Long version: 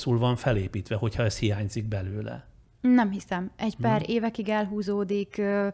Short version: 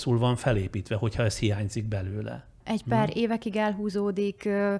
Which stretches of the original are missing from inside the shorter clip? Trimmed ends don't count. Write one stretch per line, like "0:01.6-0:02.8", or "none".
0:02.6-0:03.5